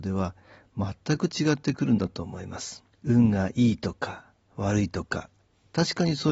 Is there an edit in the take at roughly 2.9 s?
yes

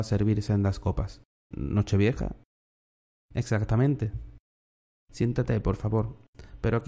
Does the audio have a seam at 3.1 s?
no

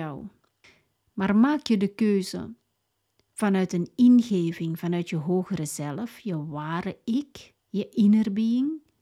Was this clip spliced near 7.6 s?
yes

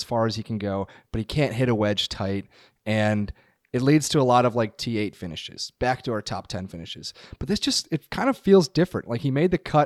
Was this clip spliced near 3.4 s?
no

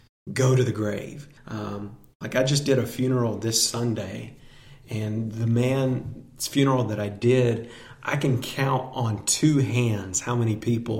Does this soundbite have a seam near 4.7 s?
no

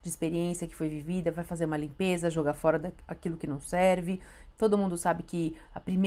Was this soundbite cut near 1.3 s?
no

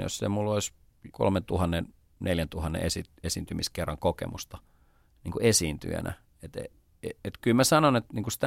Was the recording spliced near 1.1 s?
yes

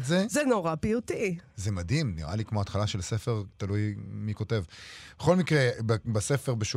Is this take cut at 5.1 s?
no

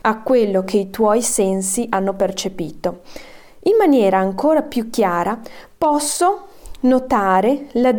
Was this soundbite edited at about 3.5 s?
no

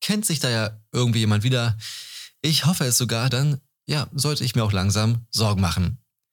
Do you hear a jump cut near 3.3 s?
yes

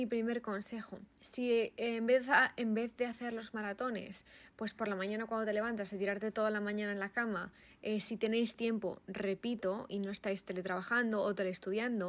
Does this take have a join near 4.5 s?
no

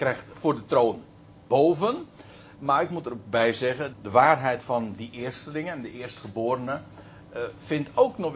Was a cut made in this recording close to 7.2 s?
no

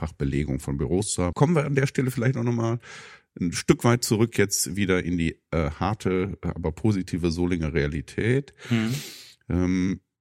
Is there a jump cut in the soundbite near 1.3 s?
yes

